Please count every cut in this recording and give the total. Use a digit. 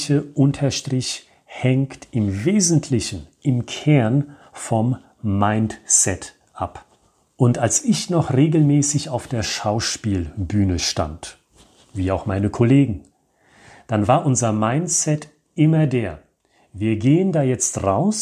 0